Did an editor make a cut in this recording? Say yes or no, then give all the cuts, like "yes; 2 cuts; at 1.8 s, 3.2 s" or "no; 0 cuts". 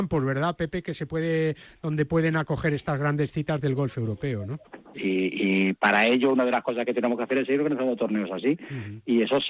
yes; 1 cut; at 4.9 s